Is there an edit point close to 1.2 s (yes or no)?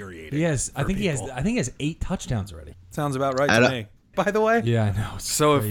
no